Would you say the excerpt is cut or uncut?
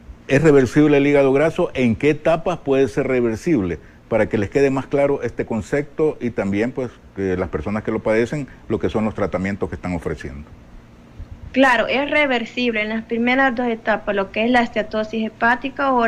uncut